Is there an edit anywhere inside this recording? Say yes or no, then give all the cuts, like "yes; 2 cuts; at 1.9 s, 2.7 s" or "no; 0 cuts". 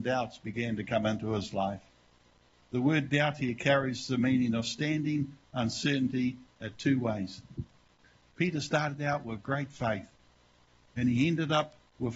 no; 0 cuts